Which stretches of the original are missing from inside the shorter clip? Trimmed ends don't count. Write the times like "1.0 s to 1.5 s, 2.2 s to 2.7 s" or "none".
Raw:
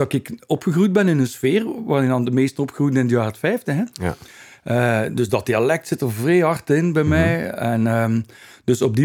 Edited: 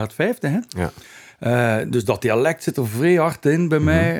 none